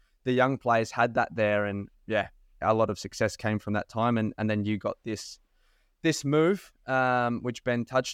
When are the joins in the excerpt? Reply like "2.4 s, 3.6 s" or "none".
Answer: 1.9 s